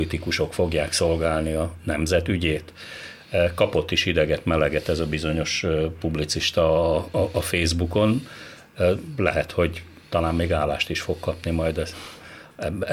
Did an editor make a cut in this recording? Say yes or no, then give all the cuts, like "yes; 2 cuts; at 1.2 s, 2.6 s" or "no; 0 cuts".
no; 0 cuts